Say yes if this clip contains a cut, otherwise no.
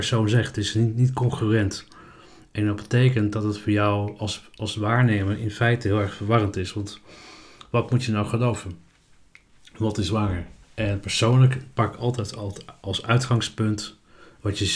yes